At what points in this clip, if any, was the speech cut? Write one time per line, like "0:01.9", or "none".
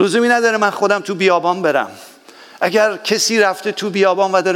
none

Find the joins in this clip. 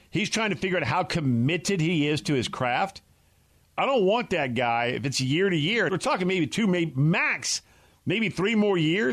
0:05.9

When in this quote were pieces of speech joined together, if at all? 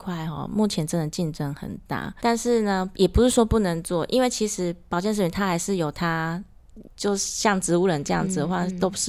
0:02.2
0:06.9

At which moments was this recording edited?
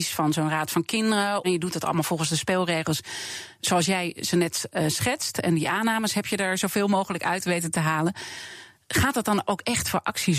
0:01.4

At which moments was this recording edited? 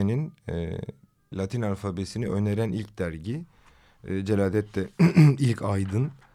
0:01.3

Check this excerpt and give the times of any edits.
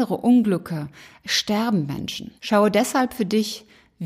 0:02.4

